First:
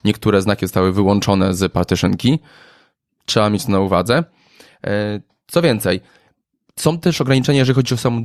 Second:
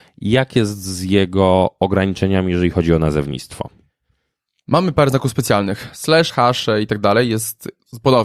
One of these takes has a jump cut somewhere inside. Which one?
second; 1 cut; at 6.3 s

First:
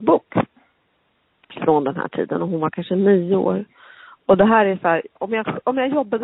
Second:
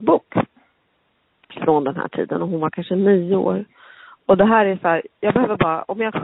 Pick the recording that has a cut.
first; 1 cut; at 5.2 s

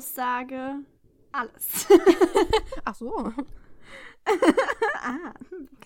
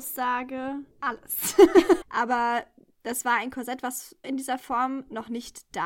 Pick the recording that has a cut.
second; 3 cuts; at 0.9 s, 2.0 s, 4.2 s

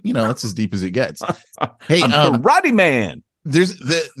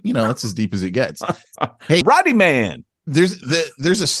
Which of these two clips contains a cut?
second; 1 cut; at 2.0 s

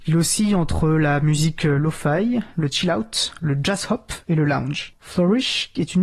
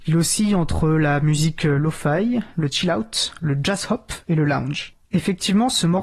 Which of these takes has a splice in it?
first; 1 cut; at 5.0 s

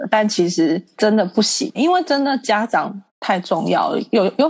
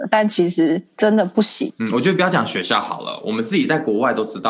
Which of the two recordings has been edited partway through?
first; 1 cut; at 1.7 s

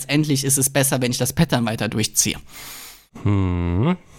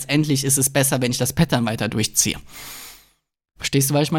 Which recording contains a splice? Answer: first; 1 cut; at 3.1 s

